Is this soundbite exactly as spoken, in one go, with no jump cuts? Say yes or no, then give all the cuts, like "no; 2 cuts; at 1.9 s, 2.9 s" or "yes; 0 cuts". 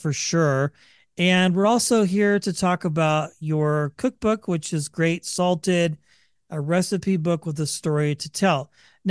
yes; 0 cuts